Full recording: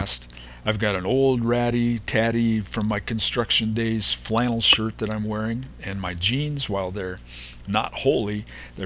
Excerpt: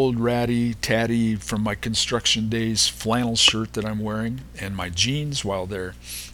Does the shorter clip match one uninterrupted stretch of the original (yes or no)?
yes